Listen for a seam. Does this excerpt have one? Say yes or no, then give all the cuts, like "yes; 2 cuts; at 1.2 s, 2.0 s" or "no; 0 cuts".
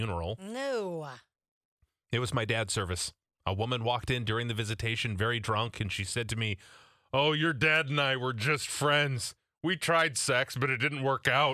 no; 0 cuts